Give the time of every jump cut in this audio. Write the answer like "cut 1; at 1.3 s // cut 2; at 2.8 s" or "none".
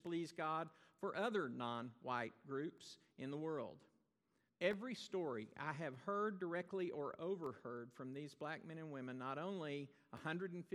cut 1; at 4.5 s